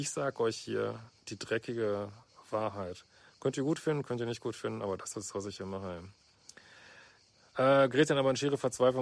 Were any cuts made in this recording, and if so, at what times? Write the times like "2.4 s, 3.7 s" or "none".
none